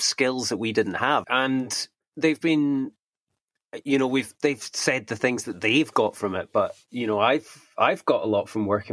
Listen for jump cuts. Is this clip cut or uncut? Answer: cut